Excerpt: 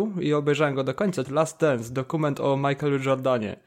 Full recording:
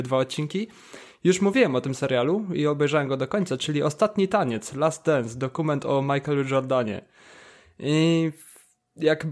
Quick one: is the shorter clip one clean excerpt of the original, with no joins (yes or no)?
no